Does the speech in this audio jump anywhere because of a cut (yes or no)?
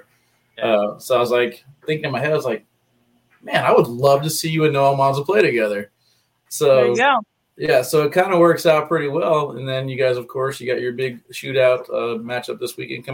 no